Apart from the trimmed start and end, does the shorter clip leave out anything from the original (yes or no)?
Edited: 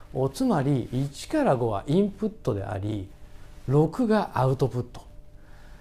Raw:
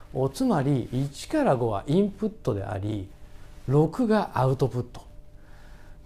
no